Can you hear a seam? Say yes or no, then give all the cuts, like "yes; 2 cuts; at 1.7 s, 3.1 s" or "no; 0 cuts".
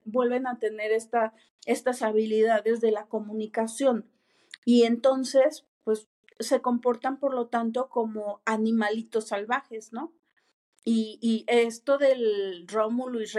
no; 0 cuts